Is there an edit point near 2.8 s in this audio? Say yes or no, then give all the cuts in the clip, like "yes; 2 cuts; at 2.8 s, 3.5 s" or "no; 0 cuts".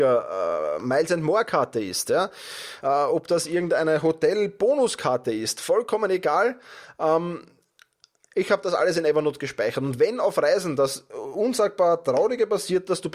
no; 0 cuts